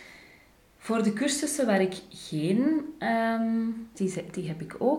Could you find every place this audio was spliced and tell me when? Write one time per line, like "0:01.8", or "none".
0:03.9